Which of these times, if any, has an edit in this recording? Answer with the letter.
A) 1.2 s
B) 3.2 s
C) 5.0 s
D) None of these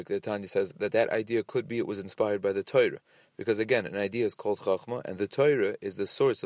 D